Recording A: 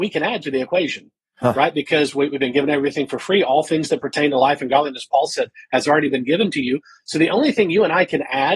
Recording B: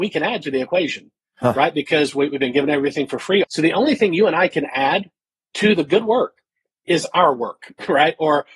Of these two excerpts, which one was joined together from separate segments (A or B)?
B